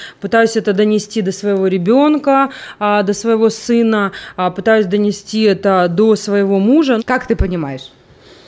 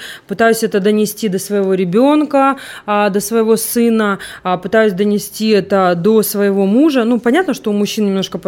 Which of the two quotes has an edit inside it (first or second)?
first